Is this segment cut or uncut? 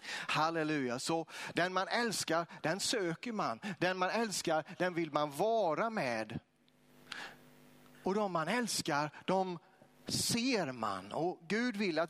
uncut